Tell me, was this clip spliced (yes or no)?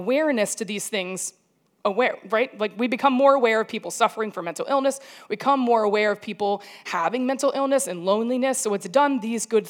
no